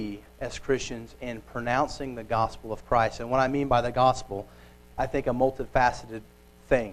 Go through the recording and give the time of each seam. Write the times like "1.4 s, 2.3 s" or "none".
4.9 s